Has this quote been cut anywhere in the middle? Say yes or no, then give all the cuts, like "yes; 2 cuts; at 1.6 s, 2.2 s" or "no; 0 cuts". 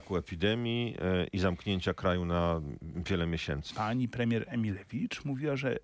yes; 1 cut; at 3.7 s